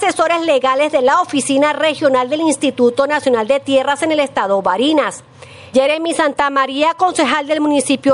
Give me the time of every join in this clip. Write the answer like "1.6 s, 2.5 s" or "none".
5.7 s